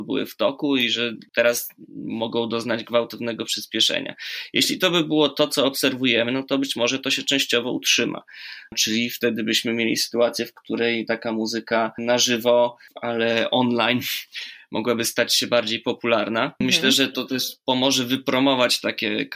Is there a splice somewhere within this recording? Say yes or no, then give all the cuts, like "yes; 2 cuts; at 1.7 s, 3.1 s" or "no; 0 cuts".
no; 0 cuts